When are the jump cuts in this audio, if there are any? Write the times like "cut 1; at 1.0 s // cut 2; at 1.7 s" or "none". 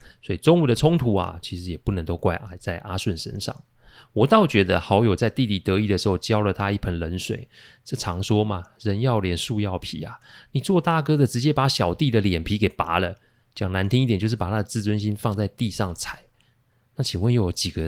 none